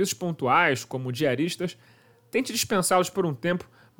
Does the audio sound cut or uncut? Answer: uncut